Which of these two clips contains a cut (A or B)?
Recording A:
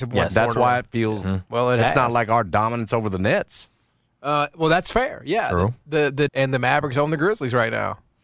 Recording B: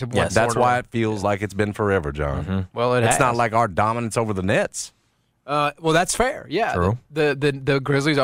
A